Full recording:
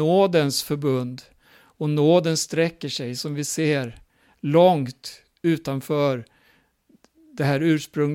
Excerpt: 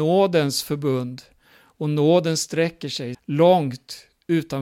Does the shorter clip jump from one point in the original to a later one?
yes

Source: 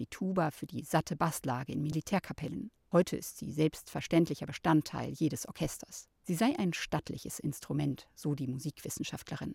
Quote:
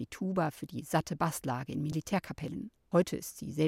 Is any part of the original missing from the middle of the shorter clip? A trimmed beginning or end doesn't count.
no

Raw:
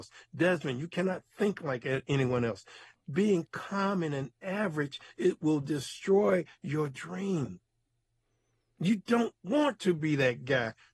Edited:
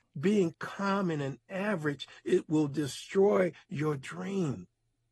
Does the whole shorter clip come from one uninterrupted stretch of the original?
yes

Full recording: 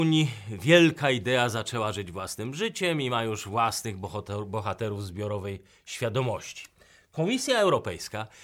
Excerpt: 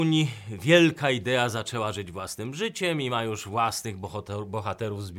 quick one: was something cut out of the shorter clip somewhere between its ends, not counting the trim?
no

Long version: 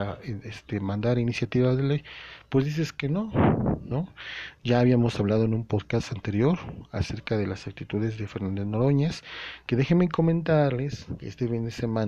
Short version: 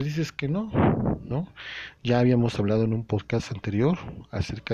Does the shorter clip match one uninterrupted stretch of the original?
yes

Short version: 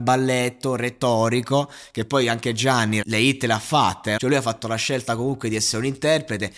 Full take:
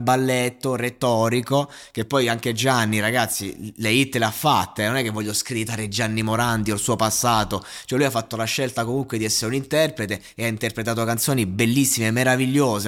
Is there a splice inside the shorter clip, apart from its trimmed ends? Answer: yes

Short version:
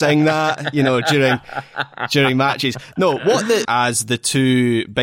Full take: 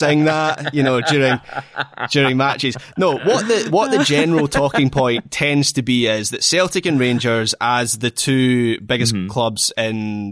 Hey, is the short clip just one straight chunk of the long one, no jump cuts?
no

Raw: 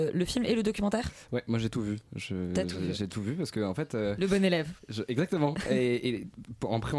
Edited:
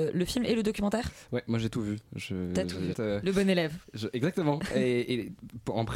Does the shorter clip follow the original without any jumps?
no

